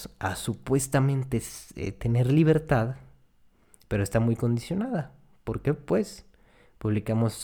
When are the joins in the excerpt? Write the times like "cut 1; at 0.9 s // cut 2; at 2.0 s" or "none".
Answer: none